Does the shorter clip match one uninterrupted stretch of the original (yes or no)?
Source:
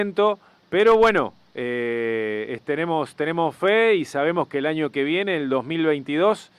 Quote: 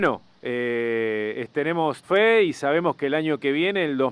no